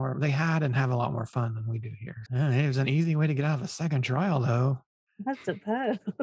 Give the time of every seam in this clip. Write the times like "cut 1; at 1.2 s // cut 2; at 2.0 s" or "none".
cut 1; at 2.3 s